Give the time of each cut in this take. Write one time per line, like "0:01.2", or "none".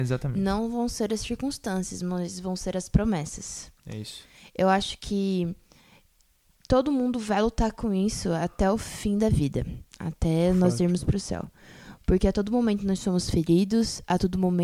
none